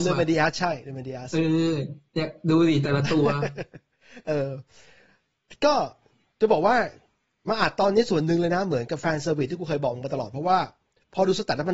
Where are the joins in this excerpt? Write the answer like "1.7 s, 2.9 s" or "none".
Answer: none